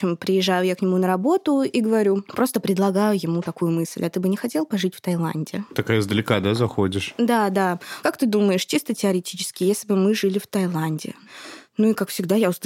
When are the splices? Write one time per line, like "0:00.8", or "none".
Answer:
none